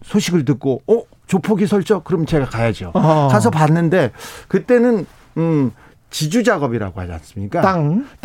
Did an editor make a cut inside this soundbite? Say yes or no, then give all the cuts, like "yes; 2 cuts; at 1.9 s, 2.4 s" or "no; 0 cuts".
no; 0 cuts